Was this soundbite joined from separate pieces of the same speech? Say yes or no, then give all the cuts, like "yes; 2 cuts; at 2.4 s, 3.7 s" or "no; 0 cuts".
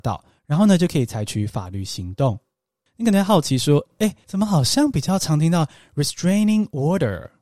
yes; 2 cuts; at 2.9 s, 4.2 s